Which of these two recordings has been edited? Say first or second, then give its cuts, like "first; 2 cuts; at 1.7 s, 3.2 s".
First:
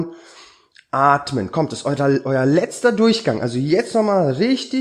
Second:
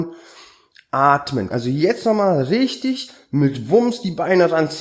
second; 1 cut; at 1.5 s